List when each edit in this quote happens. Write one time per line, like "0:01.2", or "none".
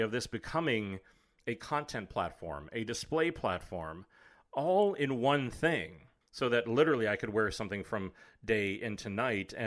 0:06.2